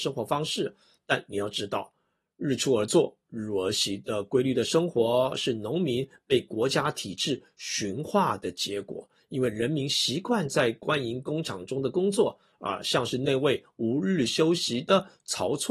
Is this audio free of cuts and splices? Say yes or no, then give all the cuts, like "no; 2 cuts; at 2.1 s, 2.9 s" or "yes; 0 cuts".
yes; 0 cuts